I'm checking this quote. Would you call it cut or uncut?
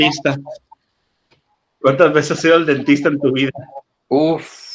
cut